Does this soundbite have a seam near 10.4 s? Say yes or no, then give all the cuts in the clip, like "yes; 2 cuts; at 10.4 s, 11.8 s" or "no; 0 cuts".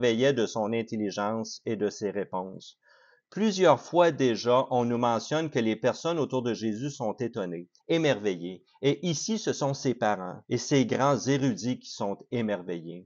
yes; 2 cuts; at 7.8 s, 10.4 s